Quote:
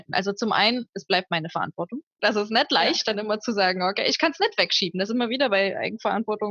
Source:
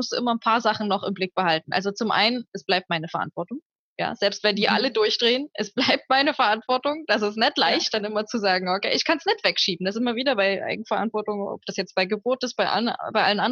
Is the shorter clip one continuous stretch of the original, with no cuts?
no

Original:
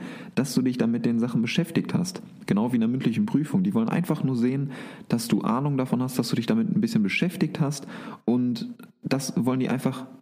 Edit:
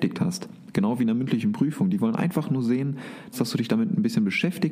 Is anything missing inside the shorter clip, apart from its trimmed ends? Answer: yes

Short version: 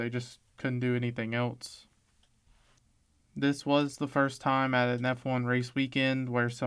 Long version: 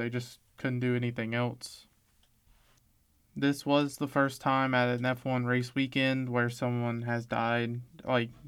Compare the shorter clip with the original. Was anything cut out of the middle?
no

